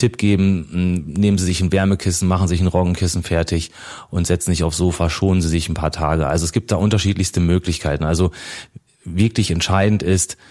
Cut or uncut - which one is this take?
uncut